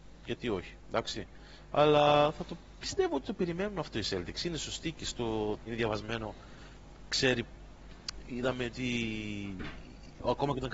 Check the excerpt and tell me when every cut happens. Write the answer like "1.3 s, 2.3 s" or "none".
5.6 s

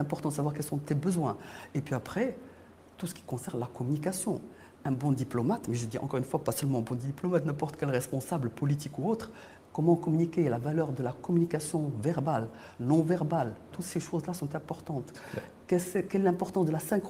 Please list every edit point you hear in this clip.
13.7 s

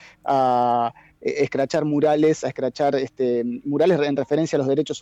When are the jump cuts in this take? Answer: none

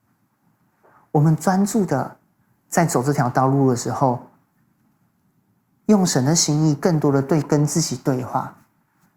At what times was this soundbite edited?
none

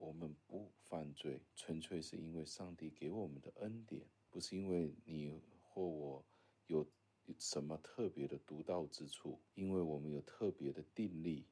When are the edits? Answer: 1.5 s

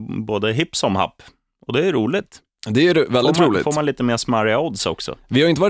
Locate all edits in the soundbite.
none

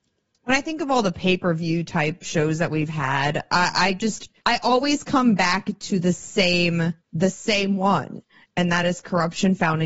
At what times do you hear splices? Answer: 4.4 s, 7.0 s

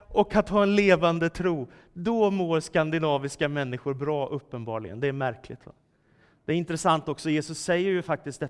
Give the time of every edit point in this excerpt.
none

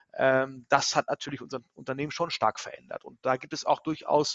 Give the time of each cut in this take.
none

